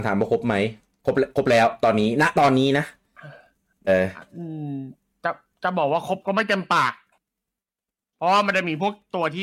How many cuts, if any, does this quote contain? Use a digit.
1